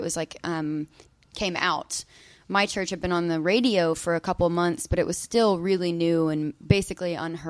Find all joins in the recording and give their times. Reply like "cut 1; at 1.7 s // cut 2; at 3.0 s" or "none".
cut 1; at 1.3 s